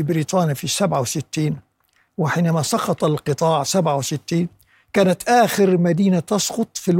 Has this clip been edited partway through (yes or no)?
no